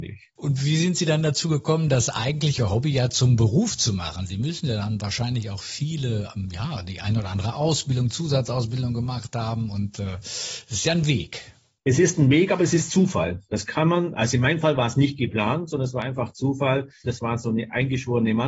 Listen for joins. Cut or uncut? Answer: cut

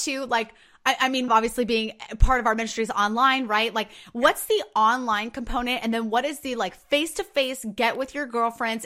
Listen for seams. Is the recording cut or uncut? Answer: cut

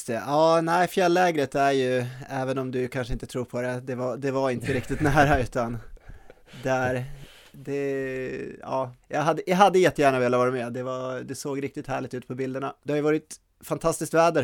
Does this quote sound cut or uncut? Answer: cut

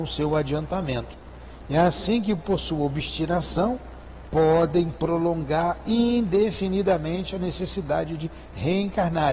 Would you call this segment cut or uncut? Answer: uncut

